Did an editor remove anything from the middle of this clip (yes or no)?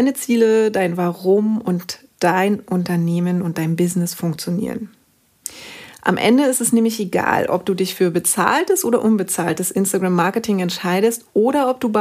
no